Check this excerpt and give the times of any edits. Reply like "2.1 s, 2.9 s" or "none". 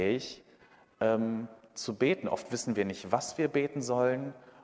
none